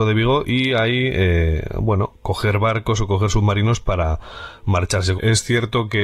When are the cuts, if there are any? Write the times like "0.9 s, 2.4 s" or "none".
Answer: 5.1 s